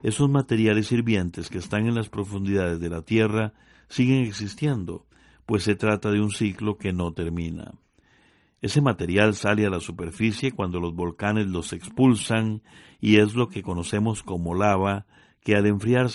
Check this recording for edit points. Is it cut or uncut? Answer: uncut